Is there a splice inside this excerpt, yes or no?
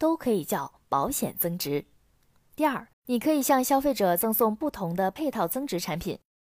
yes